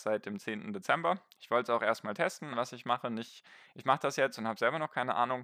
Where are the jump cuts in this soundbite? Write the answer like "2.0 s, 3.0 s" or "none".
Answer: 2.5 s